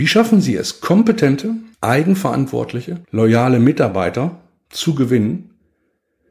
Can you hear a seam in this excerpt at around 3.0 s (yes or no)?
yes